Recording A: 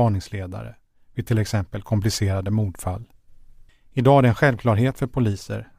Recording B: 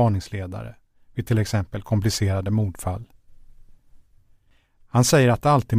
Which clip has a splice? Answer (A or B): A